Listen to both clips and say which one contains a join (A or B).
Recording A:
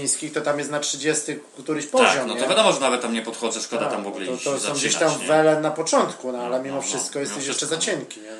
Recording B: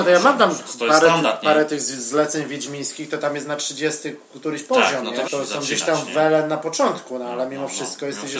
B